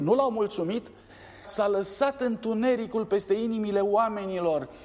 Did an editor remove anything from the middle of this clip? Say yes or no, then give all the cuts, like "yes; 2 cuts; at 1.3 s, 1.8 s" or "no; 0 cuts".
yes; 1 cut; at 1.4 s